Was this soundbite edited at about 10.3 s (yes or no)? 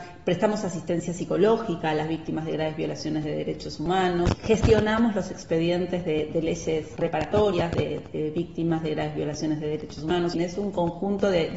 yes